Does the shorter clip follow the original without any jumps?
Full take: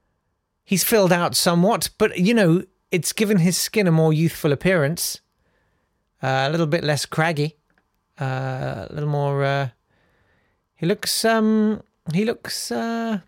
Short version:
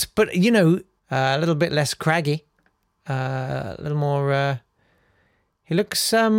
no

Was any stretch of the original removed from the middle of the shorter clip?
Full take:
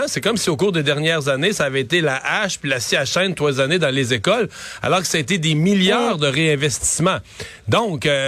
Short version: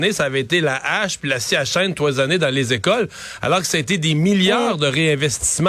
no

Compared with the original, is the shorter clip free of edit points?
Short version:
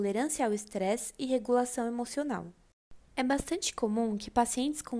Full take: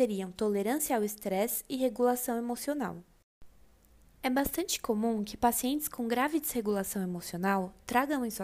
no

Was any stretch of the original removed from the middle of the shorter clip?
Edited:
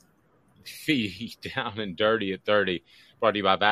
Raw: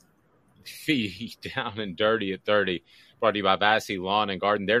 no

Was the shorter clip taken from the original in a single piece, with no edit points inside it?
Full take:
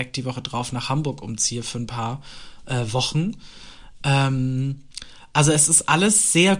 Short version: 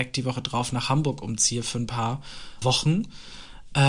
no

